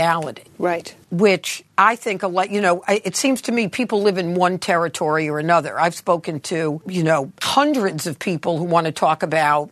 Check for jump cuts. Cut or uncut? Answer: uncut